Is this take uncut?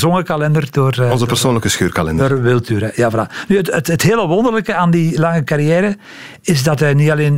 yes; 0 cuts

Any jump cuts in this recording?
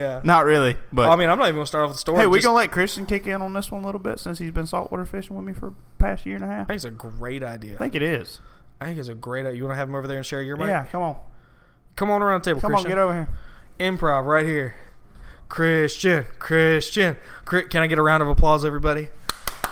no; 0 cuts

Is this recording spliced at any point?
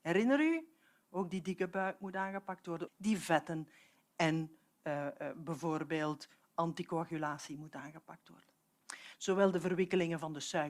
yes; 2 cuts; at 2.9 s, 9.1 s

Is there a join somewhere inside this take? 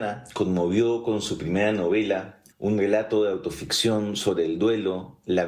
yes; 1 cut; at 2.5 s

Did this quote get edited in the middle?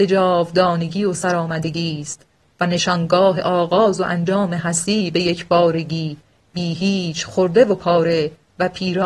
no; 0 cuts

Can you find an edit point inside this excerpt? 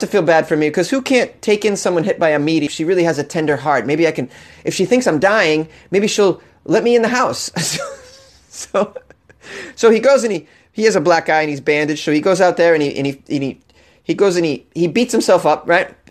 yes; 1 cut; at 2.7 s

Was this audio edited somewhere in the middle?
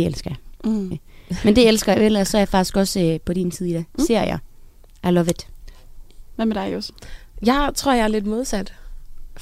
yes; 1 cut; at 0.9 s

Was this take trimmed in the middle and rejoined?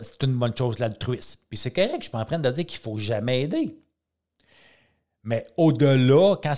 no; 0 cuts

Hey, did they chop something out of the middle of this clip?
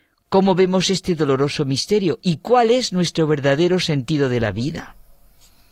no; 0 cuts

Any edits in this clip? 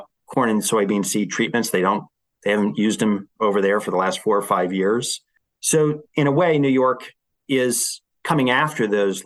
no; 0 cuts

